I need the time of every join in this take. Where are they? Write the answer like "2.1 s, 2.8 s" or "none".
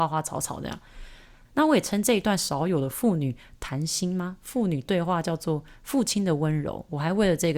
1.5 s